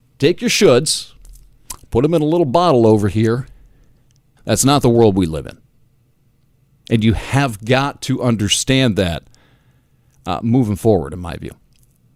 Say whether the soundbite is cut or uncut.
uncut